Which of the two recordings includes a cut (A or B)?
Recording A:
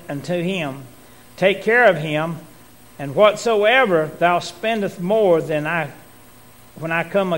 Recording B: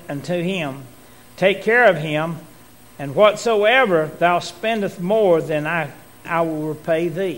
B